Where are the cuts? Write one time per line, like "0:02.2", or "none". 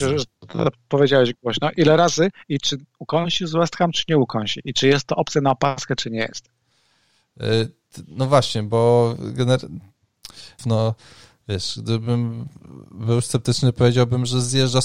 0:10.6